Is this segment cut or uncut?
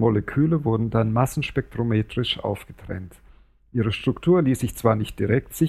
uncut